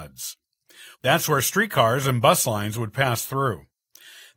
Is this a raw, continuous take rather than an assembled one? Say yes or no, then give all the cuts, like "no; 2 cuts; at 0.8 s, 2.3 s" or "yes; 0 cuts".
no; 1 cut; at 0.9 s